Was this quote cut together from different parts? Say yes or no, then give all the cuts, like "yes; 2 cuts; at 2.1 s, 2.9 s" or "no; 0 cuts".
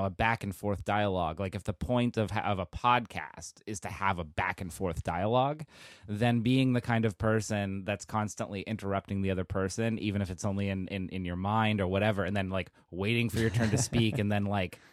no; 0 cuts